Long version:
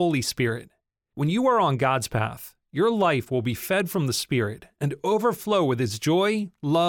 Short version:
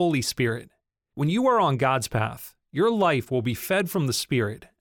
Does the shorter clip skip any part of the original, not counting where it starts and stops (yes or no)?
no